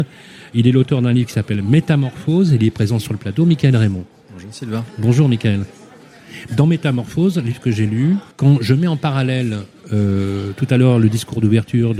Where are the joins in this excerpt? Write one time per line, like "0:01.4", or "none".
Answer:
0:06.5
0:08.3